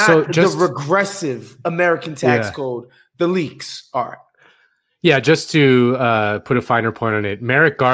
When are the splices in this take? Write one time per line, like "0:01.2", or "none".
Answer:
none